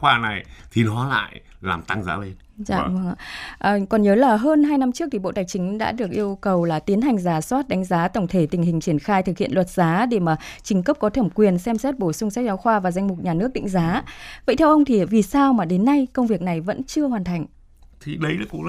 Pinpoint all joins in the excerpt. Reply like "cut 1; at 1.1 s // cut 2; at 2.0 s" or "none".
cut 1; at 3.2 s